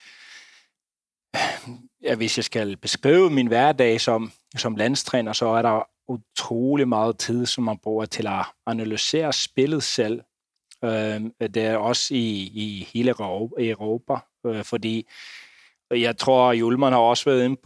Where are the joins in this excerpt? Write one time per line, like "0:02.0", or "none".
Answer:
0:11.4